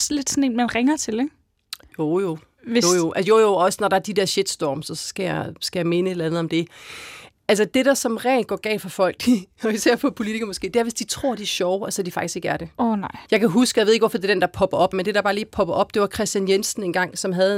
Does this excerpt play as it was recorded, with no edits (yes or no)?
no